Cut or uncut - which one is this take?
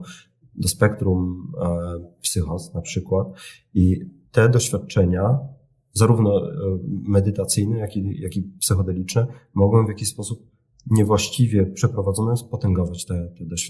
uncut